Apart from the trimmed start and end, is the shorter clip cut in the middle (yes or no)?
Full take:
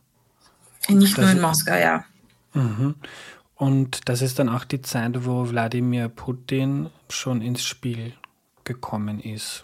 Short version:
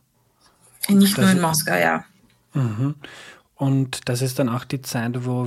no